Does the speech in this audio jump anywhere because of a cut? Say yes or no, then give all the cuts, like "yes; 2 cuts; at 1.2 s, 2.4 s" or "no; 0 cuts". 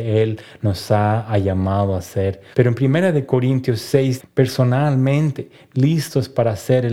yes; 2 cuts; at 2.5 s, 4.2 s